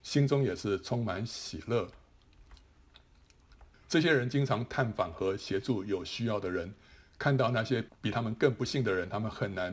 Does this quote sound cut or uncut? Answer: cut